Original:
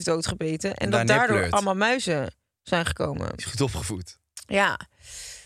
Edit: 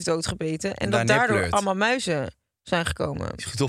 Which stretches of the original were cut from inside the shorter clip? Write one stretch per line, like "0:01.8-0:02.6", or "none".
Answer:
none